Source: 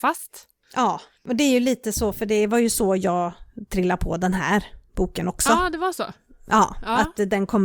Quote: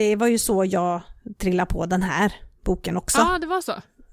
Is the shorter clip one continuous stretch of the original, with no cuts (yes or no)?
yes